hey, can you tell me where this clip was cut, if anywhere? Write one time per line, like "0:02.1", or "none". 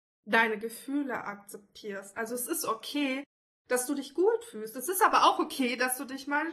none